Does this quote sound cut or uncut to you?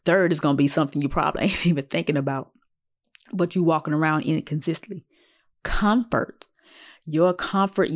uncut